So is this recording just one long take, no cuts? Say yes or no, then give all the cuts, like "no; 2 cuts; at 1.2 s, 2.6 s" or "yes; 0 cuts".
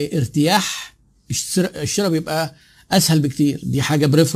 yes; 0 cuts